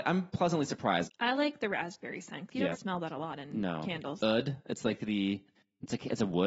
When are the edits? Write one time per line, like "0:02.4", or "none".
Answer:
0:01.0
0:02.7
0:04.2